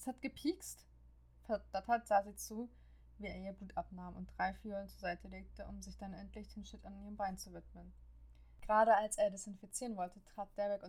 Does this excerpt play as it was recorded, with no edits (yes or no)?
yes